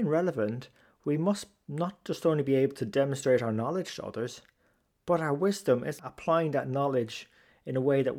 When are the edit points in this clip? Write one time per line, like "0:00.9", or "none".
0:06.0